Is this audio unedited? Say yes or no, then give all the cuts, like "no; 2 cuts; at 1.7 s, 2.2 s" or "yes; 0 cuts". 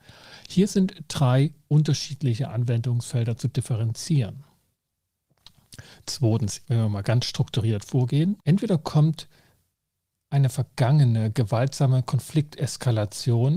no; 2 cuts; at 6.7 s, 8.4 s